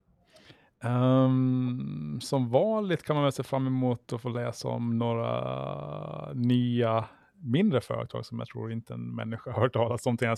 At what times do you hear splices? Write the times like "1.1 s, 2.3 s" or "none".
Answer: none